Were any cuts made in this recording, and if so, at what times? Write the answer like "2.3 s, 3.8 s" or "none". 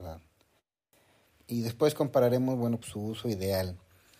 1.3 s, 2.8 s